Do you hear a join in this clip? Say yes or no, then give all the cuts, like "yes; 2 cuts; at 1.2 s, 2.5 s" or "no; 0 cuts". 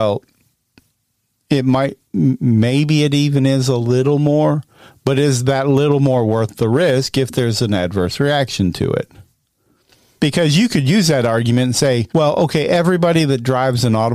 yes; 2 cuts; at 10.2 s, 12.1 s